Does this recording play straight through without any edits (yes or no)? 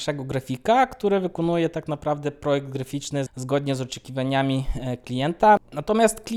no